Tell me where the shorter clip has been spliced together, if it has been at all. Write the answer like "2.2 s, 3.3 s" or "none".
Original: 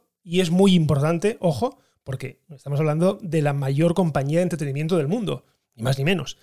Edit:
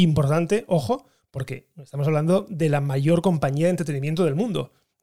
none